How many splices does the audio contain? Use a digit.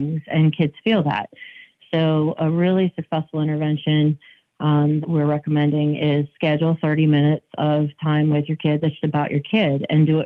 2